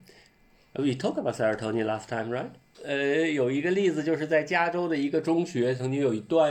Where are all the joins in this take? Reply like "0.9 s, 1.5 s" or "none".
2.7 s